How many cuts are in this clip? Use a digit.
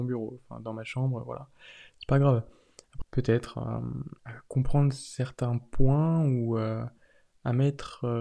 2